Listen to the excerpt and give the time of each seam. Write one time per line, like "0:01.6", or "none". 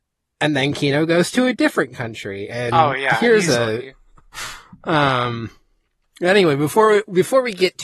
0:03.9